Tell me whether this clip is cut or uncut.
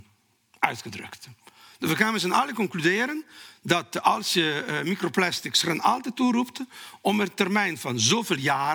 uncut